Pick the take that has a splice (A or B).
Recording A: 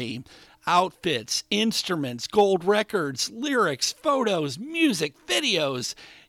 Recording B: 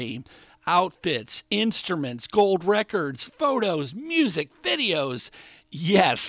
B